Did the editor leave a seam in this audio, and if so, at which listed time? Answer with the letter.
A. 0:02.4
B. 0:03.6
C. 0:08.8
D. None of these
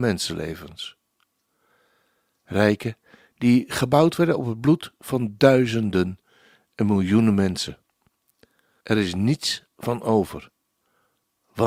C